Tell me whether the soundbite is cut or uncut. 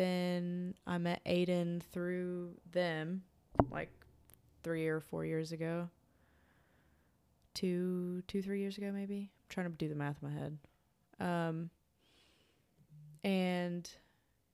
uncut